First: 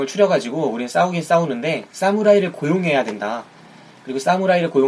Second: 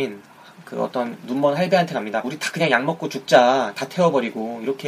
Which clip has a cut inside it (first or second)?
second